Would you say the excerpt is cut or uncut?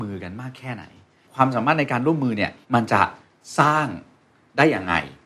cut